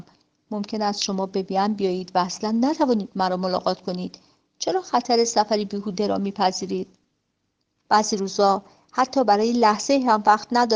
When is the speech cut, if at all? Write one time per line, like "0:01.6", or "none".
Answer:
0:07.9